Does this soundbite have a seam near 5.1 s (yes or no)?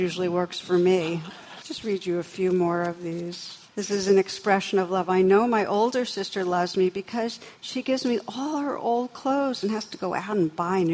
no